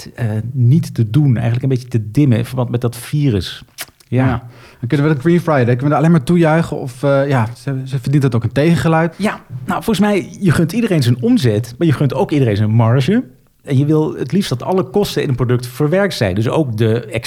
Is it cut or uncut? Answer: cut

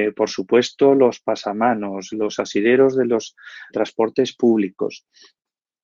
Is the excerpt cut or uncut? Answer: cut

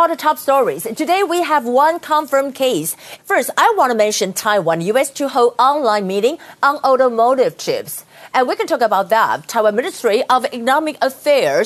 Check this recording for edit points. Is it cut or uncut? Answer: cut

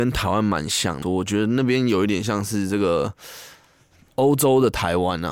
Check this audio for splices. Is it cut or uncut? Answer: cut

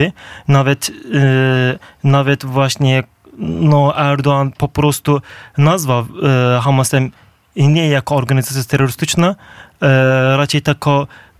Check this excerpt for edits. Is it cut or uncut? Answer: uncut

